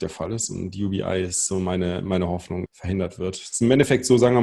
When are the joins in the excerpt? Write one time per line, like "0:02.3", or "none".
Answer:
0:02.7